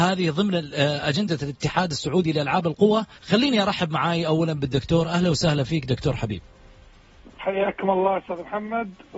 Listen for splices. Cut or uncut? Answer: cut